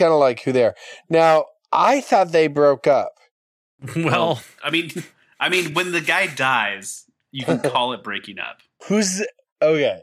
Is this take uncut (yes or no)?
yes